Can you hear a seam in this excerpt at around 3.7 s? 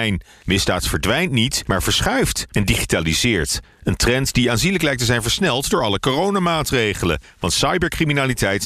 no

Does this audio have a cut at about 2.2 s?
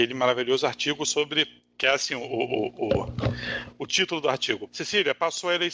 no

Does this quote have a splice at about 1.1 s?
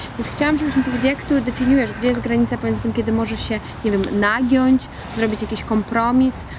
no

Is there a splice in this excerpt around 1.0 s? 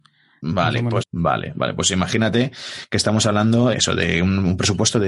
yes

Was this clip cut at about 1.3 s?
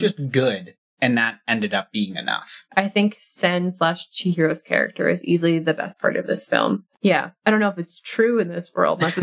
no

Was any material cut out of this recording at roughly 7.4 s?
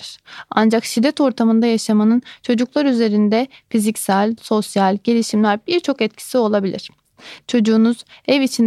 yes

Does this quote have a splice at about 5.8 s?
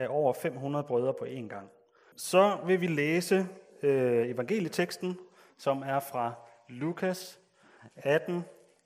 no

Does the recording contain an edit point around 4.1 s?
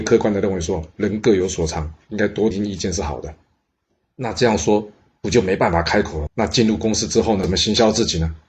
no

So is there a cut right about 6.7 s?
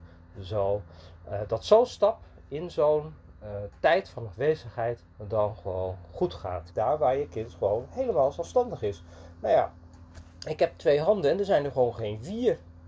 yes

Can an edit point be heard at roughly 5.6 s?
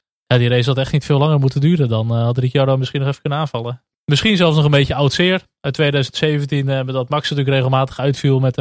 no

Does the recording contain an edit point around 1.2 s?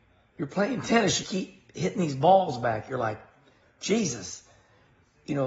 yes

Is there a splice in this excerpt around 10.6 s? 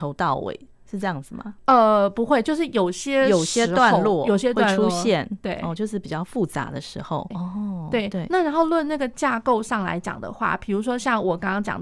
no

